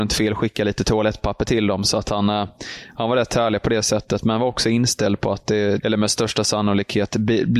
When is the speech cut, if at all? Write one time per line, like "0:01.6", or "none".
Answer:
0:05.8